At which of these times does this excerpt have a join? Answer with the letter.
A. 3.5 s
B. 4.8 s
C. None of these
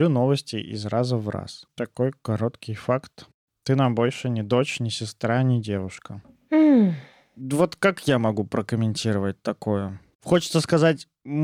C